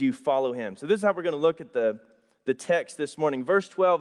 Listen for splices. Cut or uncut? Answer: uncut